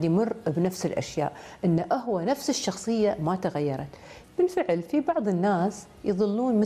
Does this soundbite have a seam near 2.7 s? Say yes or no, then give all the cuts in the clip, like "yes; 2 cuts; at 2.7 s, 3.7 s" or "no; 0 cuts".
no; 1 cut; at 4.2 s